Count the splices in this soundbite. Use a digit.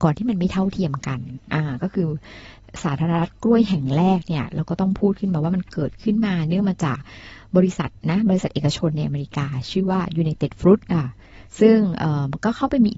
1